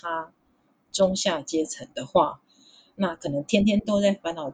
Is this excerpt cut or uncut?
uncut